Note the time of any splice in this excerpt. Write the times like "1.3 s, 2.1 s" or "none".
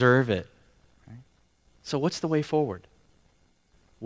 none